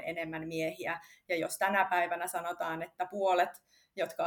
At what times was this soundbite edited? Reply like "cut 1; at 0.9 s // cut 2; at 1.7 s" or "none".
none